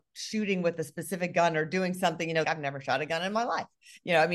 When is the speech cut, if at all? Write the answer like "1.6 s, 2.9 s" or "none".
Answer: 2.4 s